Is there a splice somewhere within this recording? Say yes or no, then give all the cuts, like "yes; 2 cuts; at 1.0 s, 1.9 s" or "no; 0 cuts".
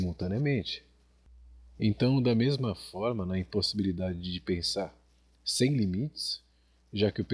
no; 0 cuts